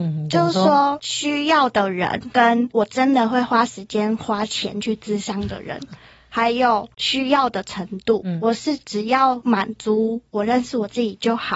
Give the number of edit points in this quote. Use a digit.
0